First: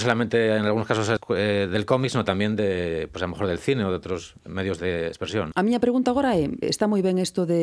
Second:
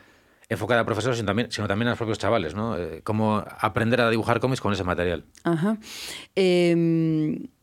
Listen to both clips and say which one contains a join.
first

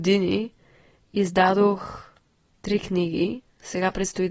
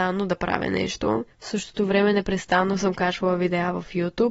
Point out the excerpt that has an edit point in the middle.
second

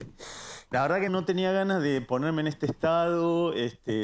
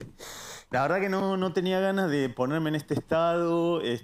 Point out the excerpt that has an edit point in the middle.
first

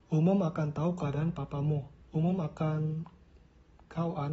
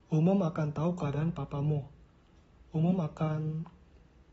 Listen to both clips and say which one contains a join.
first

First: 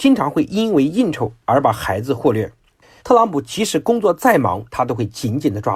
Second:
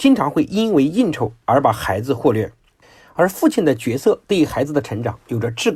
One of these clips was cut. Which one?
first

